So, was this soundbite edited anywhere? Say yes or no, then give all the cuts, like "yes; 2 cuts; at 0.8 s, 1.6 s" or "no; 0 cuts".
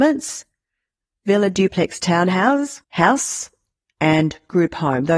yes; 1 cut; at 2.8 s